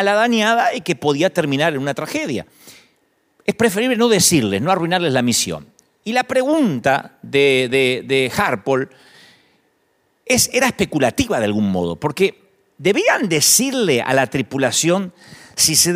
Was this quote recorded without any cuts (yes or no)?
yes